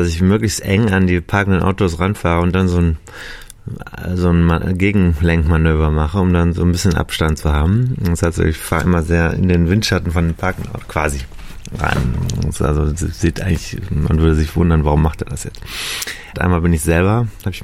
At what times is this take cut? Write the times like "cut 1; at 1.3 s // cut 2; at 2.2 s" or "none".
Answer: cut 1; at 16.3 s